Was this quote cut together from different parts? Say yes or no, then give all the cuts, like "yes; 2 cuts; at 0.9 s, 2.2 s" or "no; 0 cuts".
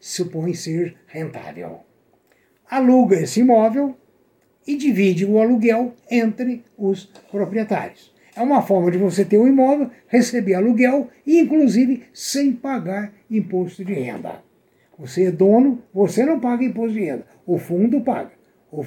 no; 0 cuts